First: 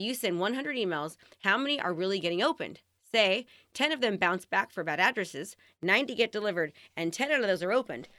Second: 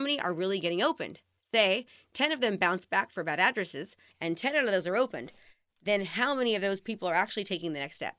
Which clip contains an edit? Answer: second; 1 cut; at 4.1 s

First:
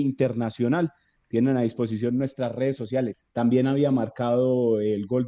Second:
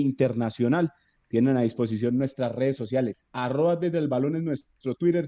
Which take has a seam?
first; 1 cut; at 3.3 s

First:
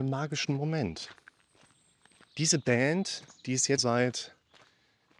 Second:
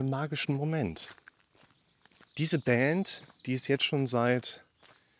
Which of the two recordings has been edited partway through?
first; 1 cut; at 3.8 s

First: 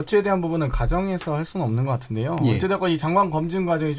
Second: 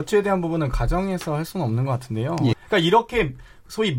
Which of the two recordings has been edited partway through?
second; 1 cut; at 2.5 s

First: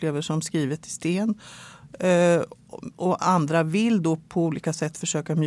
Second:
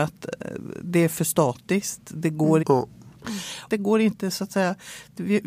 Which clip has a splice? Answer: second; 2 cuts; at 2.6 s, 3.7 s

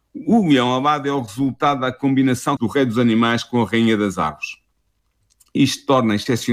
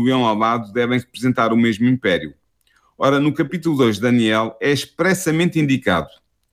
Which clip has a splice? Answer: first; 1 cut; at 2.6 s

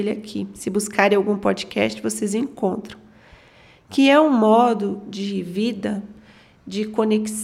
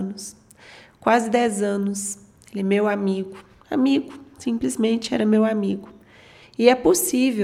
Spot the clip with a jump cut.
second; 1 cut; at 6.4 s

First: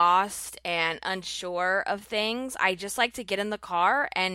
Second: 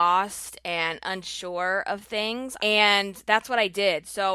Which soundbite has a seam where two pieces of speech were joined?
second; 1 cut; at 2.6 s

